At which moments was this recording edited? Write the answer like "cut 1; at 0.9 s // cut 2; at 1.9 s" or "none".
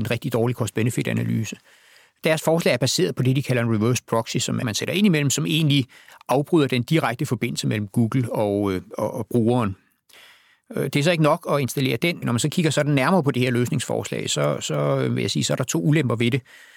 cut 1; at 4.6 s // cut 2; at 12.2 s